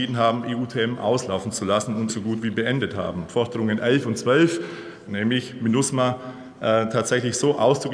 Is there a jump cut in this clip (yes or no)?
yes